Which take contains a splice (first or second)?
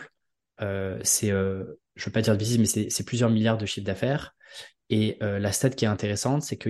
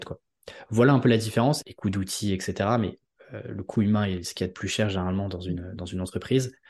second